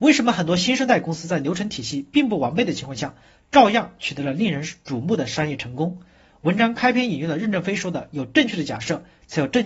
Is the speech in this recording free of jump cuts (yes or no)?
yes